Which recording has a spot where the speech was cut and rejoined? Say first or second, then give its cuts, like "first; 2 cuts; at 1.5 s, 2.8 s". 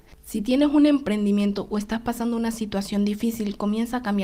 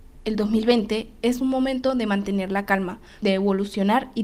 second; 1 cut; at 3.2 s